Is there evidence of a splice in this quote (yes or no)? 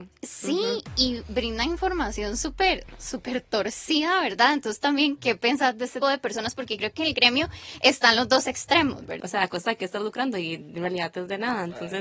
yes